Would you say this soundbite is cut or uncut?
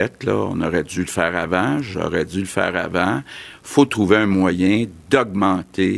uncut